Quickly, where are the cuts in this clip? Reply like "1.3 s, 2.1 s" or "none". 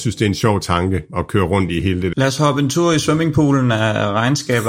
2.1 s